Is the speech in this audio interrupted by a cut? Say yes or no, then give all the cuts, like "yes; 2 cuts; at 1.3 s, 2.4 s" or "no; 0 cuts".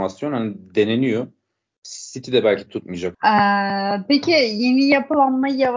yes; 1 cut; at 3.1 s